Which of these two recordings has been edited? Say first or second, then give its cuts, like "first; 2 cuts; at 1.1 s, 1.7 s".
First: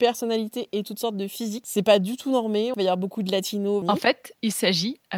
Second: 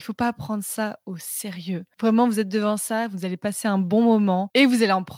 first; 2 cuts; at 2.7 s, 3.8 s